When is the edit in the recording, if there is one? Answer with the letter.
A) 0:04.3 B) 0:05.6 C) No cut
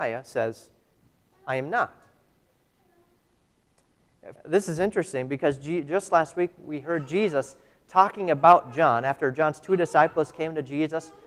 A